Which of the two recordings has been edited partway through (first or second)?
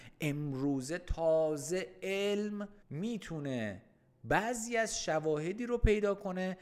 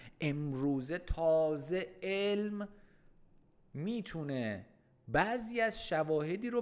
first